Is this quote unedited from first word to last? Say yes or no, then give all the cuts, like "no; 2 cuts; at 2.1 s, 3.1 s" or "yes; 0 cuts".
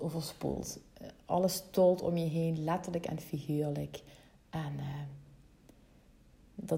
yes; 0 cuts